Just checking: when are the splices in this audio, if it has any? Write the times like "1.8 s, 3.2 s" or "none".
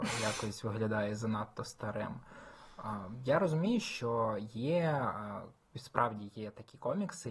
5.6 s